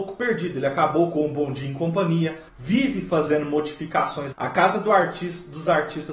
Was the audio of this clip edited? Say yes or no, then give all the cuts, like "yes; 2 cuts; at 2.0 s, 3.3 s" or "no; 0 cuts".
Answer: yes; 2 cuts; at 2.5 s, 4.3 s